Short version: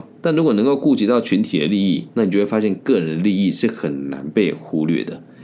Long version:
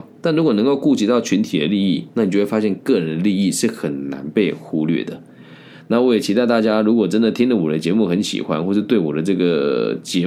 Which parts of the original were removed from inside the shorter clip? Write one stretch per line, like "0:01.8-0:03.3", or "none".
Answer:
none